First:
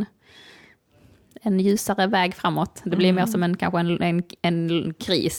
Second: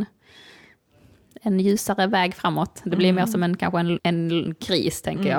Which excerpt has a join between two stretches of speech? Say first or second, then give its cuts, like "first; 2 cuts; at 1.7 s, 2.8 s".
second; 1 cut; at 4.0 s